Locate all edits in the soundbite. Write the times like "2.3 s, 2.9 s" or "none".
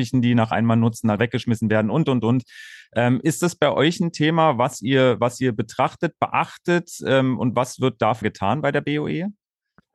1.2 s, 8.2 s

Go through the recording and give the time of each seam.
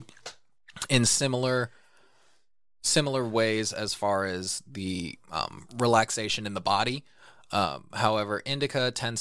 none

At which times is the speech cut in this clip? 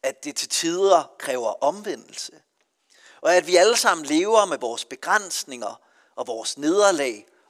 none

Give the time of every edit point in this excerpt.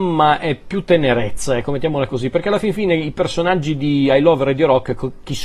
none

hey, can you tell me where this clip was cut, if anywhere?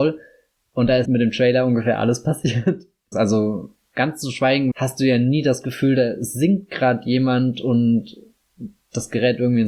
1.0 s, 3.1 s, 4.7 s

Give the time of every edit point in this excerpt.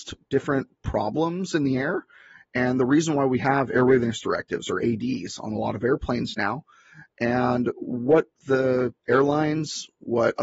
none

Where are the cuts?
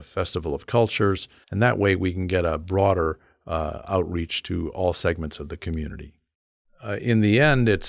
1.4 s

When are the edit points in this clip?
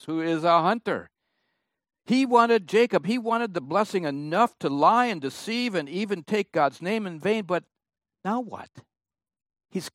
none

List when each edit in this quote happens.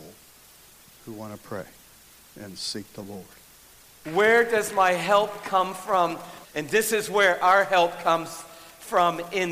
4.0 s, 6.4 s

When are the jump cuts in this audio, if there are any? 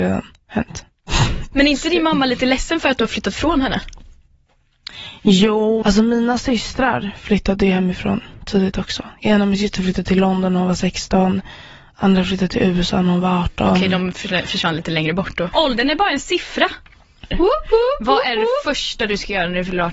5.8 s, 15.5 s, 17.3 s

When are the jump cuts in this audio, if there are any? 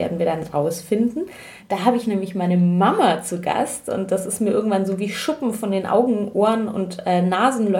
1.6 s

